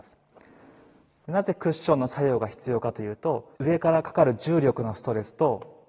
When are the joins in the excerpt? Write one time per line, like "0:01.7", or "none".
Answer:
0:03.6